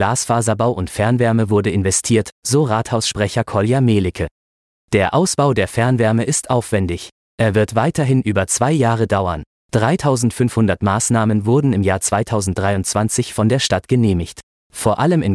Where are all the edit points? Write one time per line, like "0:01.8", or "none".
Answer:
0:09.5